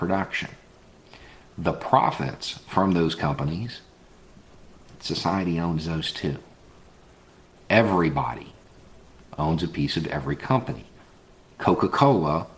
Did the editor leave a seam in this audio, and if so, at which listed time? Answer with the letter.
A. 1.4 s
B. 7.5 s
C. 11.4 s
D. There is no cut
B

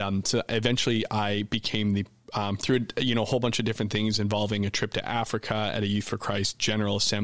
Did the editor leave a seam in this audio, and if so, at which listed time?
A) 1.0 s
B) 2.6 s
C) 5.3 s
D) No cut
B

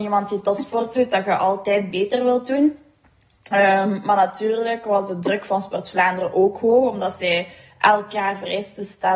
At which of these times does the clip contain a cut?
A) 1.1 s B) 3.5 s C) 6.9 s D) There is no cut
D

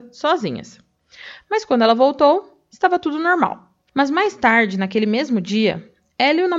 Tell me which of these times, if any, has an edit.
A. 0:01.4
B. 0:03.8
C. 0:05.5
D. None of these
B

